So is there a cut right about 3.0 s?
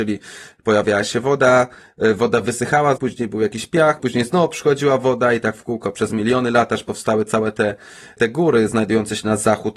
yes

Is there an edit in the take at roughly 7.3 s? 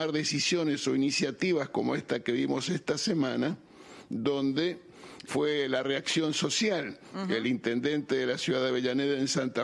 no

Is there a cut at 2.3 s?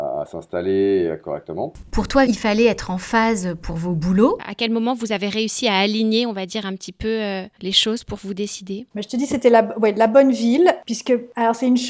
yes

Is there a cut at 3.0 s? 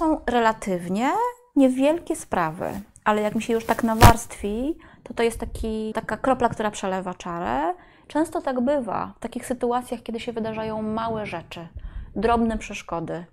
no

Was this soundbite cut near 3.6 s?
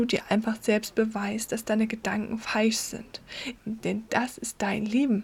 yes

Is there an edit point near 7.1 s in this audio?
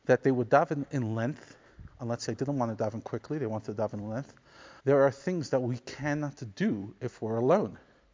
no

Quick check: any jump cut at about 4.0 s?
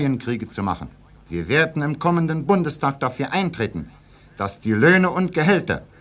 no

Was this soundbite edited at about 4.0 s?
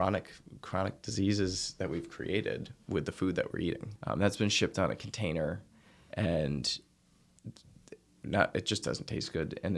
yes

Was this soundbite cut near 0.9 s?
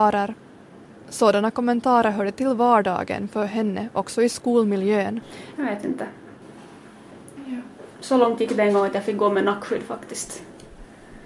yes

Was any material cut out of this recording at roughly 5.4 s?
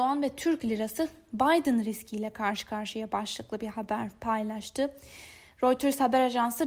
no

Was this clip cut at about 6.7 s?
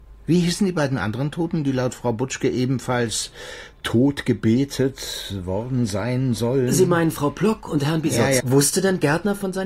no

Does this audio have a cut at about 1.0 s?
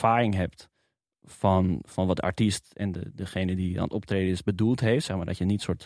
no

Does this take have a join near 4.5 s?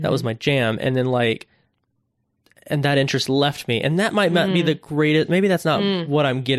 no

